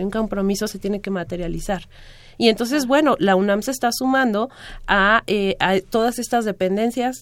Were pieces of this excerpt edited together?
no; 0 cuts

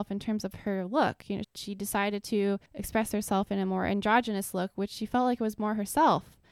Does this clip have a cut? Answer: yes; 2 cuts; at 1.4 s, 2.7 s

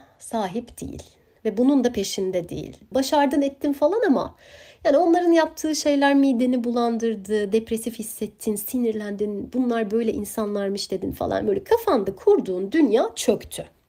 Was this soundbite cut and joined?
yes; 1 cut; at 2.9 s

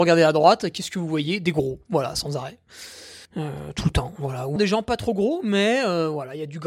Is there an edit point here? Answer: yes; 2 cuts; at 3.3 s, 4.6 s

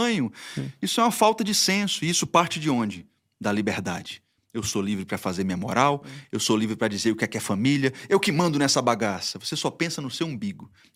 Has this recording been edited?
no; 0 cuts

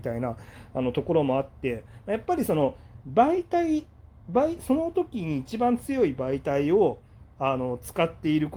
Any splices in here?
no; 0 cuts

